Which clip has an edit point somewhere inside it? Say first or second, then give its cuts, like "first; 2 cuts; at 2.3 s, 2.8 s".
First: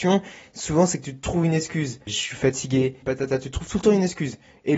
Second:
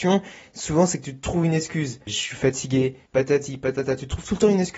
first; 1 cut; at 3.0 s